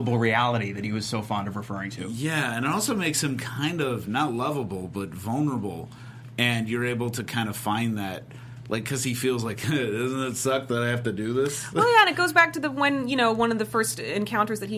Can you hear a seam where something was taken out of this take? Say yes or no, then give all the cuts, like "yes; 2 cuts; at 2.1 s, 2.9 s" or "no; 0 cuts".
no; 0 cuts